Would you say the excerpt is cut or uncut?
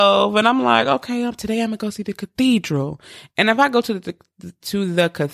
uncut